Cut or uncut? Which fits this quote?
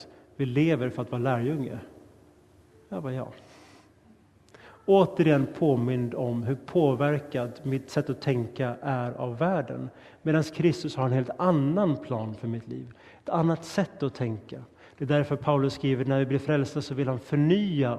uncut